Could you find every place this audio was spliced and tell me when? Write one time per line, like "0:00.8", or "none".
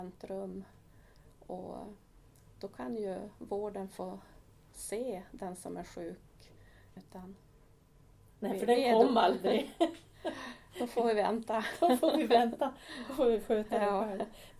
0:07.0